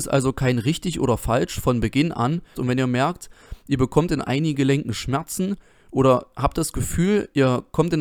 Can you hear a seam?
yes; 1 cut; at 2.5 s

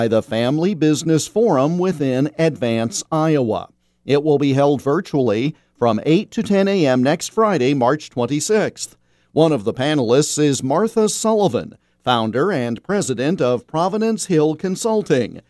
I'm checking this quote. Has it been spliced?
no; 0 cuts

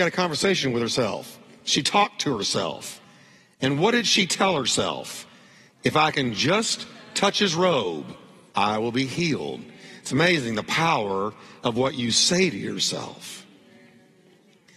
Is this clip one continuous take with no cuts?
yes; 0 cuts

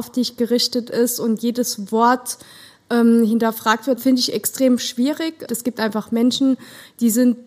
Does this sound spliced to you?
yes; 2 cuts; at 4.0 s, 5.5 s

